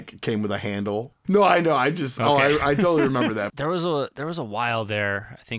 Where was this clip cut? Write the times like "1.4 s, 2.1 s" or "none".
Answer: 1.2 s, 3.5 s